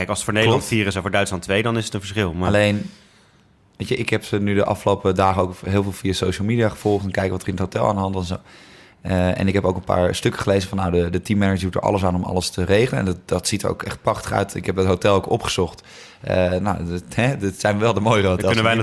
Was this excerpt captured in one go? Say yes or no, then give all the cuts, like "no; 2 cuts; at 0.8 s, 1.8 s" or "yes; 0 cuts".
yes; 0 cuts